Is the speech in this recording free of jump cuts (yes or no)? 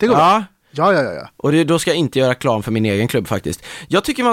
yes